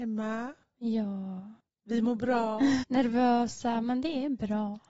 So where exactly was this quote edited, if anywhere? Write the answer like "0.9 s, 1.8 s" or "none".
2.8 s